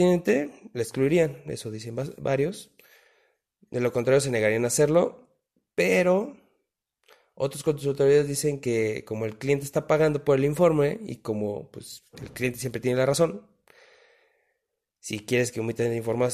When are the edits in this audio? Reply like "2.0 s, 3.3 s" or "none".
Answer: none

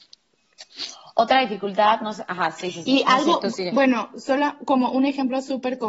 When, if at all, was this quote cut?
none

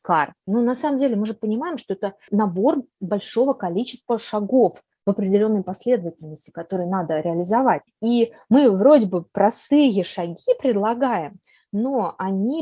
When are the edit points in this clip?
7.9 s

